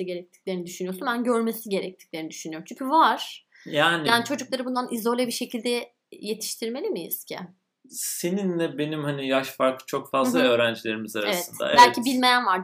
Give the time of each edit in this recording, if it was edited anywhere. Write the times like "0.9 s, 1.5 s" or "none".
none